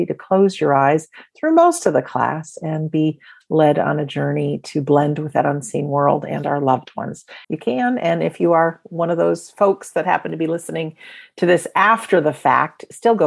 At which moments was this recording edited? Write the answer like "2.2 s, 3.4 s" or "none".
7.4 s